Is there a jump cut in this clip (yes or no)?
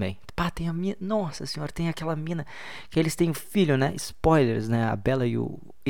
no